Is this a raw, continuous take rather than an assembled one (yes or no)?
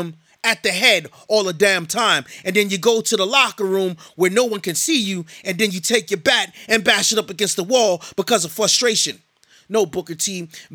yes